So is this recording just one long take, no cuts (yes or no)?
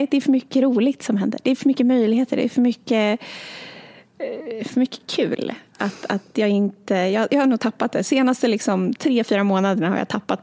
yes